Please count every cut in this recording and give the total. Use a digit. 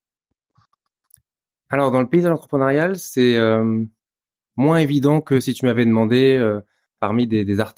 0